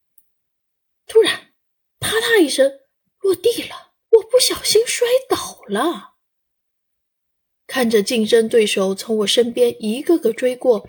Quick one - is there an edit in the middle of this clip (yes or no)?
yes